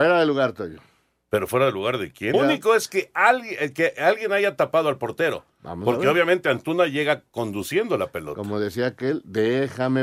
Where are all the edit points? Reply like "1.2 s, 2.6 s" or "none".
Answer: 2.3 s